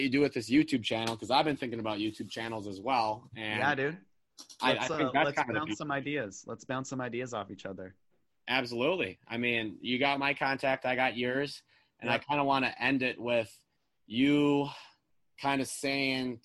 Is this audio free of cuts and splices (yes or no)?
yes